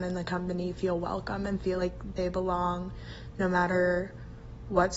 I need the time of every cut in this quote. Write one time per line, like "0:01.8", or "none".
none